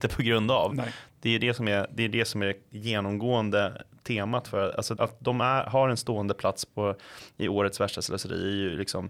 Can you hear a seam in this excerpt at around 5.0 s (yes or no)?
yes